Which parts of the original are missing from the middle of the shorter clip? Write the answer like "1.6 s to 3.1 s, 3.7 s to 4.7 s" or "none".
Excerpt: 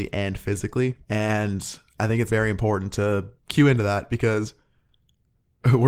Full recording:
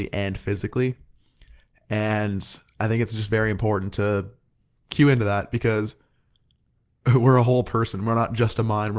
1.0 s to 1.8 s, 3.1 s to 3.3 s, 4.4 s to 4.8 s

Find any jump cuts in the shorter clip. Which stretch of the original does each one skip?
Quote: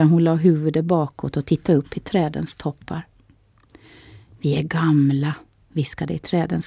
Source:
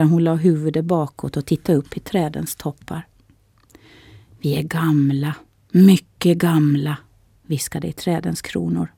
5.6 s to 7.3 s

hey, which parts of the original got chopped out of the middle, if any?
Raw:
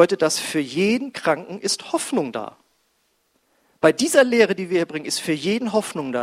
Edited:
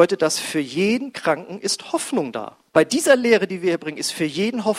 2.7 s to 3.7 s

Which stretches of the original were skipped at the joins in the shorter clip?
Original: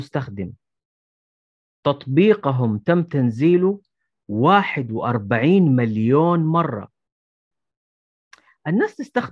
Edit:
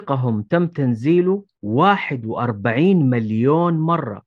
3.9 s to 4.2 s

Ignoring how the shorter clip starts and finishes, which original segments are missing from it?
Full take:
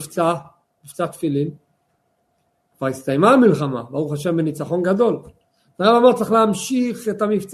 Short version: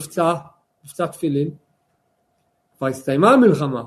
none

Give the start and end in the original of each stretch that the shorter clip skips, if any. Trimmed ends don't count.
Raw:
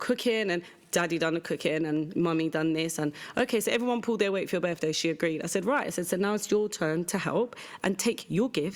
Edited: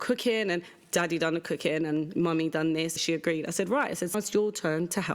3.0 s to 4.9 s, 6.1 s to 6.3 s

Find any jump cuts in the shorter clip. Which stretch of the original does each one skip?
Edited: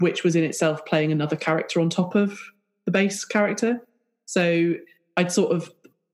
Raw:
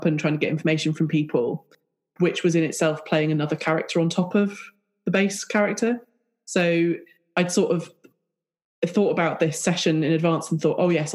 none

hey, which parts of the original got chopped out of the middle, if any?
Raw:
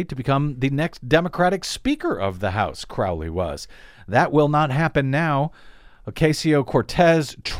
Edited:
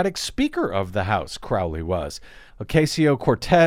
3.9 s to 5.9 s

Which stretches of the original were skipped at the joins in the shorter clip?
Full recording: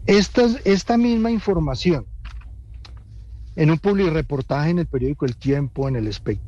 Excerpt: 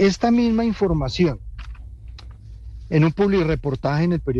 none

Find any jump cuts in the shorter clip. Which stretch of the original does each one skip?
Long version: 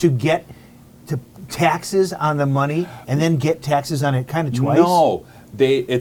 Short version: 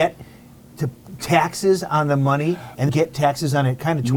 3.2 s to 3.4 s

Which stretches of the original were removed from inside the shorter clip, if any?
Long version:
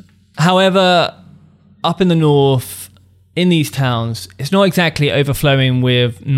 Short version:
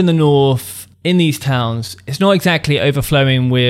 3.0 s to 3.3 s

